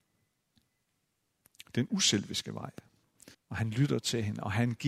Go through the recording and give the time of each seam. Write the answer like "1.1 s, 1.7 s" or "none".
3.3 s